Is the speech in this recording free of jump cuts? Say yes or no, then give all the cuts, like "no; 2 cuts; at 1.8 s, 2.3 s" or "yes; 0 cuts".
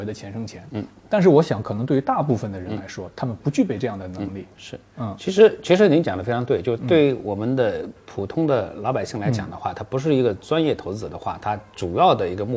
no; 1 cut; at 4.5 s